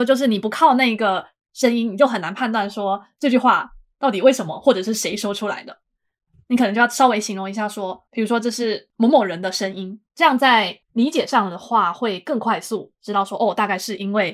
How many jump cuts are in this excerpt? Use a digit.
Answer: 0